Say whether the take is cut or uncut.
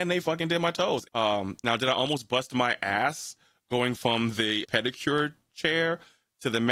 cut